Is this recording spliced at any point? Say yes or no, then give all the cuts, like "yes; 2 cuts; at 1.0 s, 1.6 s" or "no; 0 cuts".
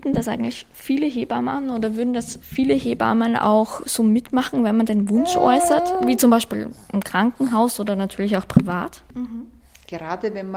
yes; 1 cut; at 9.1 s